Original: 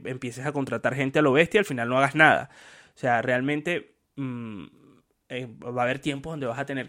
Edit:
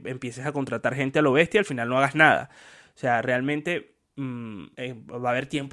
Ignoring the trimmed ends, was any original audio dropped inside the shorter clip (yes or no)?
yes